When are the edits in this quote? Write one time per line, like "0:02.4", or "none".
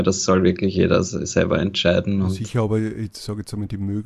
none

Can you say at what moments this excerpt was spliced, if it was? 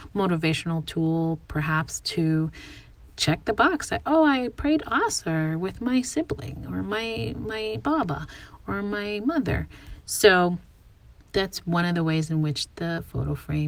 none

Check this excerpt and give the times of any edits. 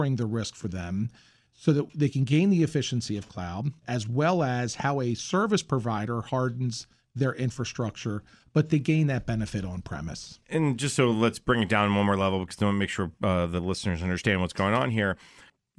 0:03.8
0:10.4

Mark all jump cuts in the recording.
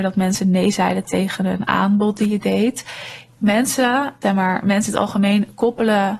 0:04.2

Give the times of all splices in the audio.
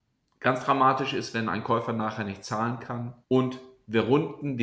0:03.2

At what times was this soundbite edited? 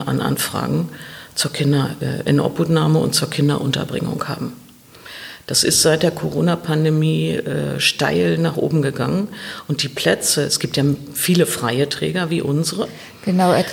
none

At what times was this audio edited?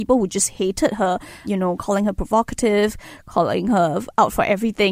0:01.4

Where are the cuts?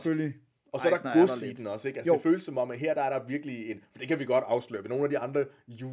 none

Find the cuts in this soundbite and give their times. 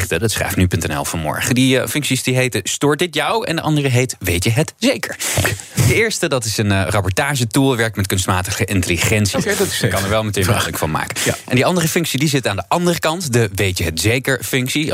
0:09.3

